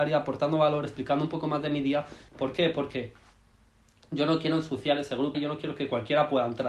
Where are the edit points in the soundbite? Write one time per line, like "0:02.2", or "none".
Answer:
0:02.3
0:05.3

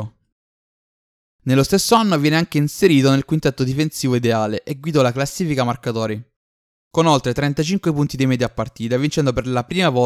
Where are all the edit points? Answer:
0:01.2

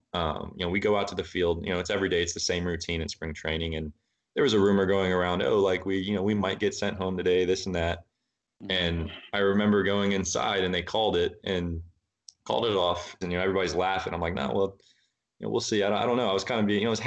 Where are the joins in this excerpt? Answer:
0:13.2

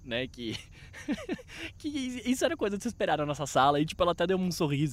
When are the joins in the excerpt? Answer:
none

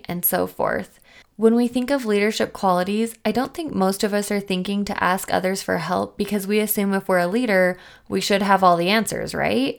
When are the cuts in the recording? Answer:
0:01.2

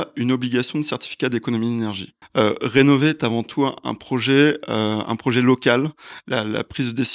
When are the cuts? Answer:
0:02.2

